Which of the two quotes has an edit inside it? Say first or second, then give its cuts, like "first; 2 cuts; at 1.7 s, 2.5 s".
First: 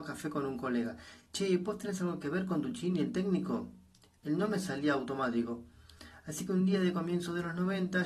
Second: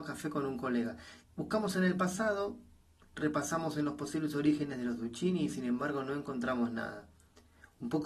second; 1 cut; at 1.2 s